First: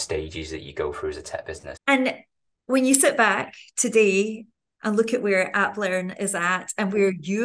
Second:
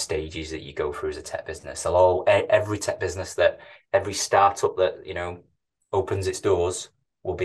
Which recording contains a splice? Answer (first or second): first